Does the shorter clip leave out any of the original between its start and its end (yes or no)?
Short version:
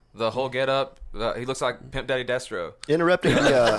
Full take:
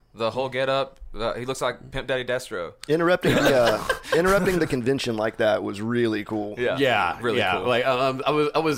no